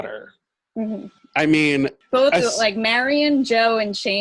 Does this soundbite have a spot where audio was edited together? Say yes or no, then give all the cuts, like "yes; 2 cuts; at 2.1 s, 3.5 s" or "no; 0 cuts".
yes; 1 cut; at 1.2 s